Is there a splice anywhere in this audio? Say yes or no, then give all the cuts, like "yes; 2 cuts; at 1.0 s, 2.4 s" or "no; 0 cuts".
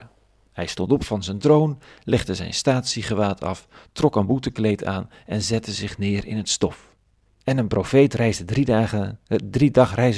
yes; 1 cut; at 7.3 s